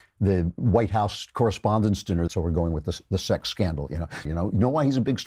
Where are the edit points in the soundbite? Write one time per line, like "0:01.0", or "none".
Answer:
0:02.3
0:04.2

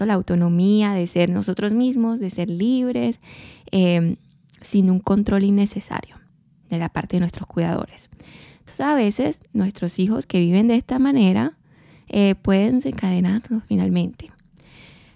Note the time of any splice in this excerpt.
none

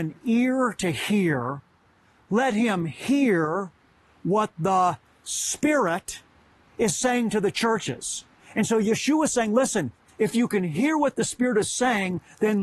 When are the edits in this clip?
none

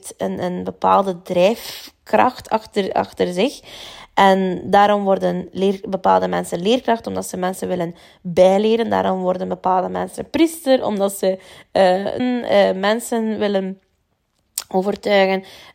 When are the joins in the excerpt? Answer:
0:12.2

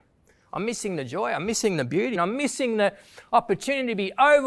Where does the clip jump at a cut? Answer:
0:02.2

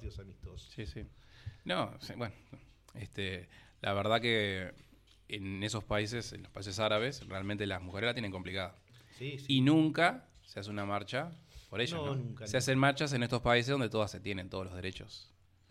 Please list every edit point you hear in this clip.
none

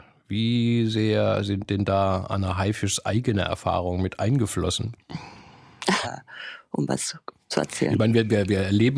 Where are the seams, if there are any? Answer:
0:06.0

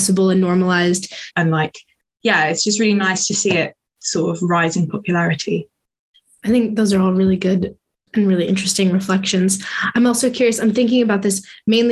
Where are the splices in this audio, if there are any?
0:01.3

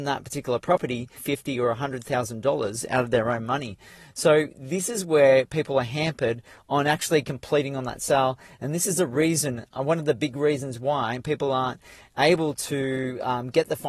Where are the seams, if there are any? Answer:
0:01.2

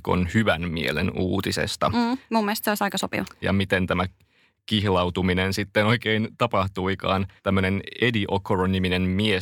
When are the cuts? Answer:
0:03.4
0:07.4

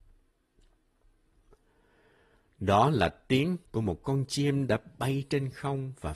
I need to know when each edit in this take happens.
0:03.7

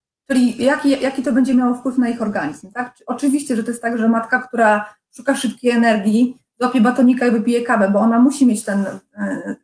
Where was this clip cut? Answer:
none

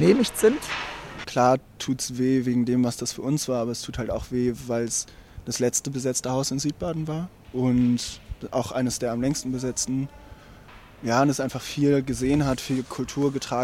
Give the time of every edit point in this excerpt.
0:01.2

